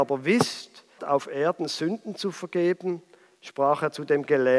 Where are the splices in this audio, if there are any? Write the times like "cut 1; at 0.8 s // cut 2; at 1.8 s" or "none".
cut 1; at 1.0 s

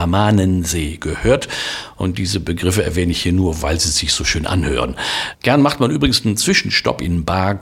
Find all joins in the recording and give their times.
cut 1; at 5.3 s

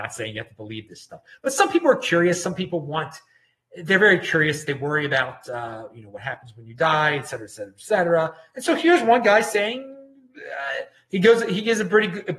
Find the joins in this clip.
none

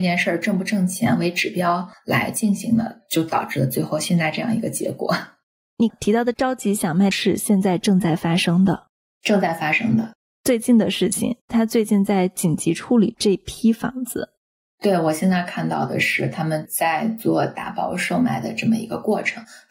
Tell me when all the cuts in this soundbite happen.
cut 1; at 5.9 s // cut 2; at 7.1 s

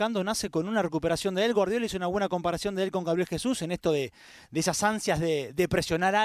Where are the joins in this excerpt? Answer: none

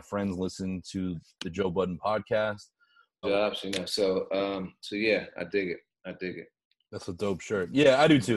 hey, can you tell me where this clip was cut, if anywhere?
cut 1; at 3.2 s

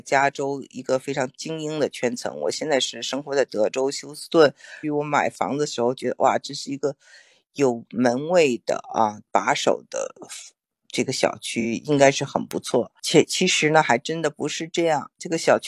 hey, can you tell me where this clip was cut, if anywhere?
cut 1; at 4.8 s

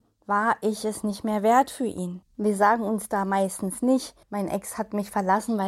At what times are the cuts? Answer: cut 1; at 2.2 s // cut 2; at 4.2 s

